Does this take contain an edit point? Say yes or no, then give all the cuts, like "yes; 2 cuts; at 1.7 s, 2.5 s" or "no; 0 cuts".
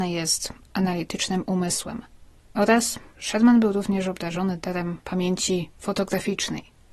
yes; 1 cut; at 3.1 s